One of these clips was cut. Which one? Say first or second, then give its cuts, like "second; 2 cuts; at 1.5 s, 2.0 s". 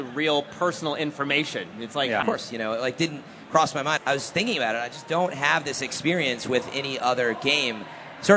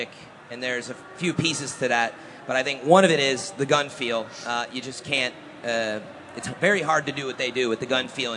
first; 2 cuts; at 2.2 s, 4.0 s